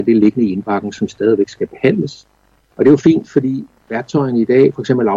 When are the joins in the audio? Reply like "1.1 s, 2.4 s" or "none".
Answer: 2.7 s